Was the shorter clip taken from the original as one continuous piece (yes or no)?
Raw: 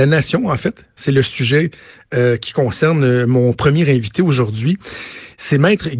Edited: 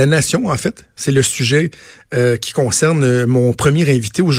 yes